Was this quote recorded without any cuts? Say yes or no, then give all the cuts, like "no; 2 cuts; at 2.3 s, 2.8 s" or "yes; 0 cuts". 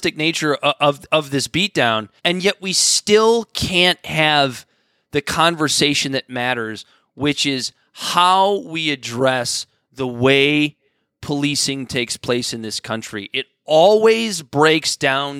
no; 1 cut; at 2.2 s